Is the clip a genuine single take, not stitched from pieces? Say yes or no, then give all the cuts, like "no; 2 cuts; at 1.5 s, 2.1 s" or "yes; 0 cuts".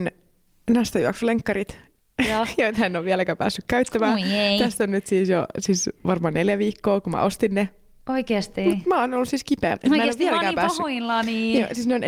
no; 1 cut; at 9.8 s